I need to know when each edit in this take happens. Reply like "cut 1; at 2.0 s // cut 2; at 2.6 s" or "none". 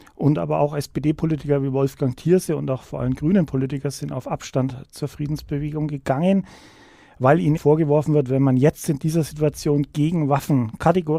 cut 1; at 7.6 s